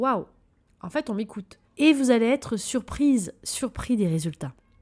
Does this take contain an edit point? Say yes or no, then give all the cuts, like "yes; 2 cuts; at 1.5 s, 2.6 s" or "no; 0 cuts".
yes; 1 cut; at 1.7 s